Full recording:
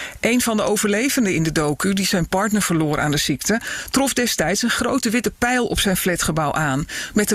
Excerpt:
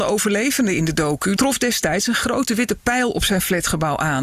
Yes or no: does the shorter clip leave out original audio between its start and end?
yes